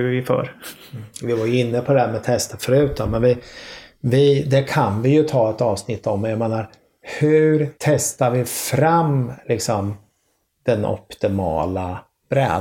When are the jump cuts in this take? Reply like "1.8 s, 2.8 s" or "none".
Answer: 7.7 s